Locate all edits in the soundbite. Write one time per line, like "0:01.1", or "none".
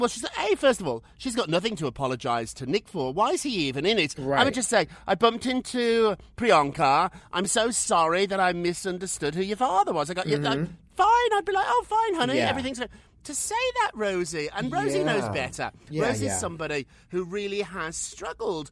none